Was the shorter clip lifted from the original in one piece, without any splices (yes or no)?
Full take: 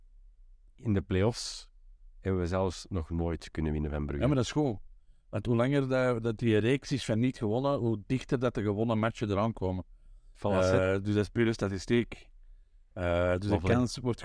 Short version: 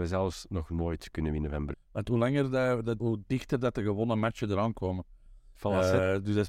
no